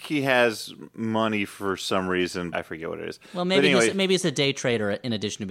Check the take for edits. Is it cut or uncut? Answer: cut